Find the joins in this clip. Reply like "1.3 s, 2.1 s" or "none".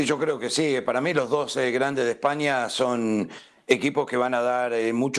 none